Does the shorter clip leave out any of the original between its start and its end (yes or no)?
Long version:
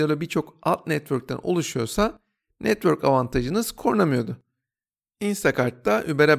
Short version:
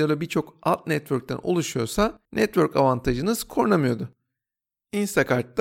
yes